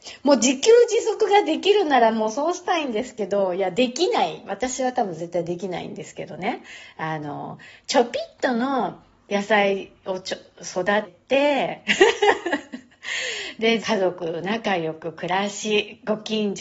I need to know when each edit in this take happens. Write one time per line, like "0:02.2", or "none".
0:11.0
0:13.8